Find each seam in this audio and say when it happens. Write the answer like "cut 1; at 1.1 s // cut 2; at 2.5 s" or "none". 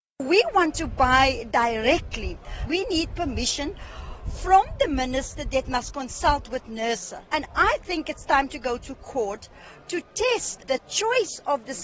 cut 1; at 2.7 s // cut 2; at 7.3 s